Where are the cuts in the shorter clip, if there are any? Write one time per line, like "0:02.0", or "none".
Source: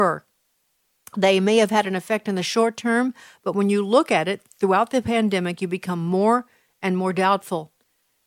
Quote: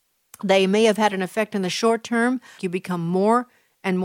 0:02.6